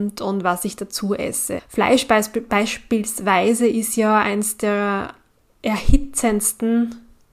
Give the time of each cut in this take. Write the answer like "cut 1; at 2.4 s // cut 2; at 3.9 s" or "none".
cut 1; at 1.6 s